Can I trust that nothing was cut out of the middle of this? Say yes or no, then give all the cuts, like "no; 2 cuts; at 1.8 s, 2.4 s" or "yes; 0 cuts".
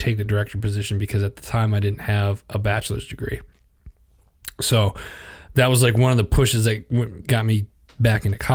yes; 0 cuts